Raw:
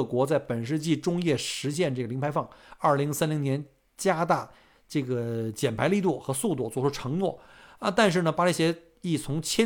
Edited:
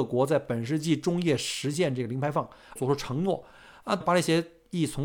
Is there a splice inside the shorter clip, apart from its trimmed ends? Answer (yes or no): yes